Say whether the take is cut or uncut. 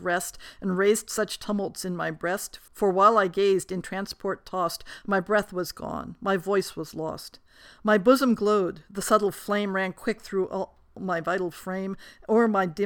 uncut